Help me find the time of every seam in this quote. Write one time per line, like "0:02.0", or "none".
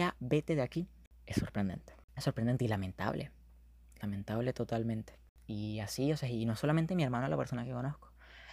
none